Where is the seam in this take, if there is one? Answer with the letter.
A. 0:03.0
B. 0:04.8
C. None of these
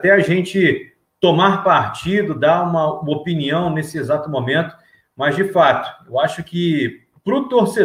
C